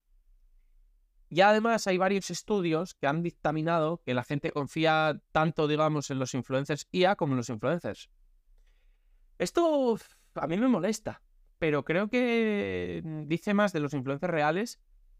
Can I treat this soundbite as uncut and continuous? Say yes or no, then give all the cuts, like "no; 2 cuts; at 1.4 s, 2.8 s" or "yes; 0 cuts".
yes; 0 cuts